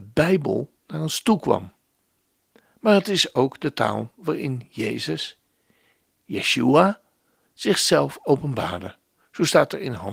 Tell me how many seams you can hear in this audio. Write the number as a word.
zero